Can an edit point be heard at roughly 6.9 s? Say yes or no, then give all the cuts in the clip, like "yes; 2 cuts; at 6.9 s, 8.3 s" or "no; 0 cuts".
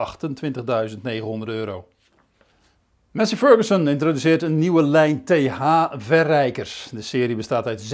no; 0 cuts